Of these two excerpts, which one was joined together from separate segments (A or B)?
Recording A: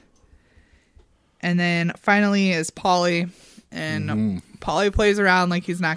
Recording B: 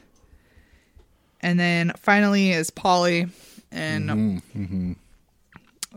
B